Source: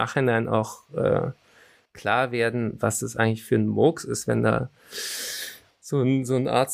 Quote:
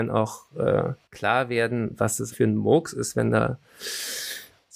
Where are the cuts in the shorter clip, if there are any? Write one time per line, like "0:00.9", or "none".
0:01.0
0:02.3